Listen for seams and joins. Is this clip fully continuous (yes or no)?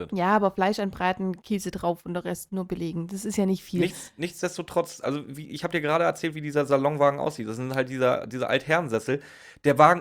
yes